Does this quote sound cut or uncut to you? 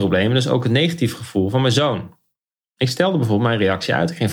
cut